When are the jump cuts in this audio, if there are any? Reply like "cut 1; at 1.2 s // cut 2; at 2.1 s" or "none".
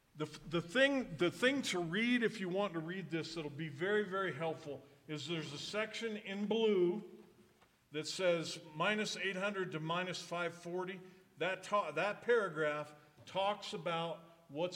none